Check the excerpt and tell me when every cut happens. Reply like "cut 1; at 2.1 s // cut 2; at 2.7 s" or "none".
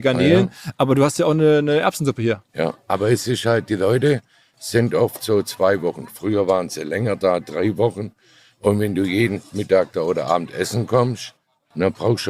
none